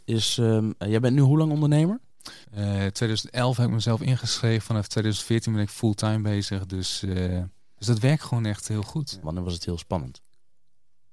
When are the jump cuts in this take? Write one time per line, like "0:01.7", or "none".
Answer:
0:02.4
0:07.8
0:09.2